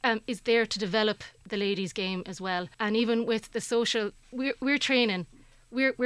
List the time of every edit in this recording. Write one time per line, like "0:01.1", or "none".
0:02.7
0:04.2